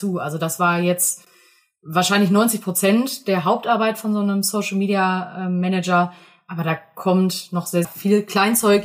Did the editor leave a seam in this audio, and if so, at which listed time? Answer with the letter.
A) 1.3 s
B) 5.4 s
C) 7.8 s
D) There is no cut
C